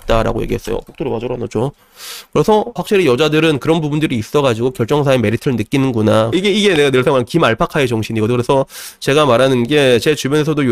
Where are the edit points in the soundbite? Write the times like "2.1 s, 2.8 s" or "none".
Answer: 2.8 s, 6.3 s